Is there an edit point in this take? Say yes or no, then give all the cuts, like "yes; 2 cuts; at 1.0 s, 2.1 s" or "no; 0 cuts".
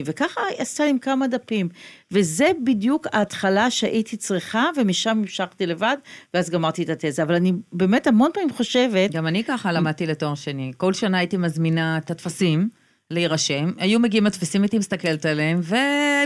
no; 0 cuts